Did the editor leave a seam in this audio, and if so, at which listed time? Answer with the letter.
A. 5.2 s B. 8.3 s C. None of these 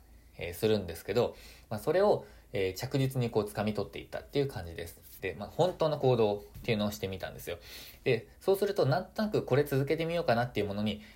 A